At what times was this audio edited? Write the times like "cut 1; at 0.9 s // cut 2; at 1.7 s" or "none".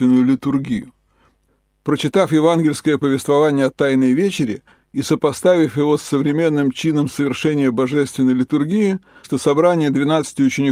cut 1; at 9.2 s